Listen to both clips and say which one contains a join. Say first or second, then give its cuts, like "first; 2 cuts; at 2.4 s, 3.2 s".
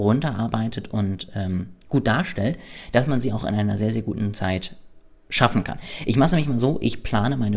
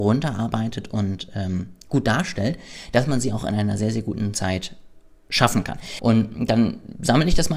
second; 1 cut; at 6.0 s